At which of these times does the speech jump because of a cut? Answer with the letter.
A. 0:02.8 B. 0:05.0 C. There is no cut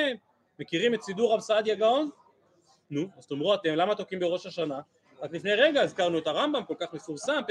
A